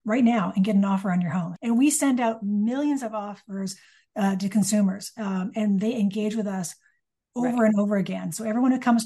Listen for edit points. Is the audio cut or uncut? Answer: cut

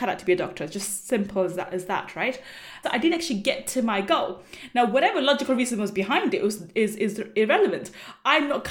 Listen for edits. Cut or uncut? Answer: cut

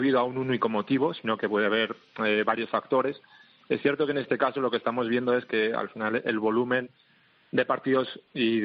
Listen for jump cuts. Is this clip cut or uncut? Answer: uncut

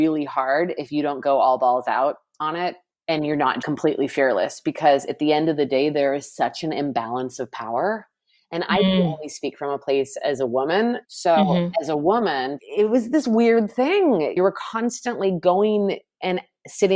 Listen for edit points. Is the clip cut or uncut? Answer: cut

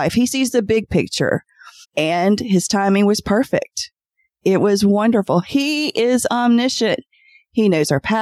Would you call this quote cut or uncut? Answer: cut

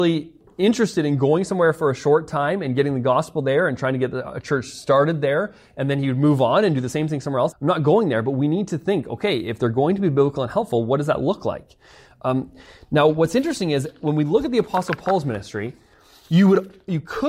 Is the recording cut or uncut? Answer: cut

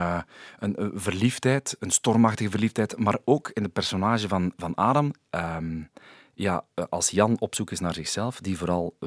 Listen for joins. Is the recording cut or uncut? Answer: cut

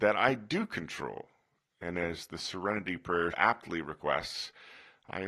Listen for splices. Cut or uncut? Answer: cut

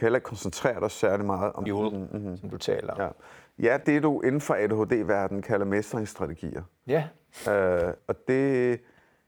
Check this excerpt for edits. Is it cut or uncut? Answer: cut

